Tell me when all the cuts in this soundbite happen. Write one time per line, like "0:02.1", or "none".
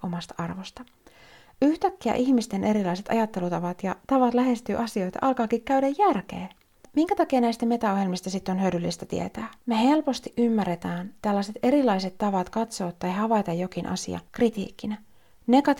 0:06.8
0:09.6
0:14.3